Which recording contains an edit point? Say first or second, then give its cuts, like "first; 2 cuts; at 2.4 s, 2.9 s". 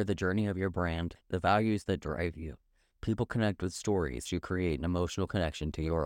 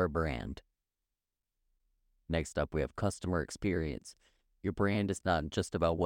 first; 2 cuts; at 1.2 s, 4.3 s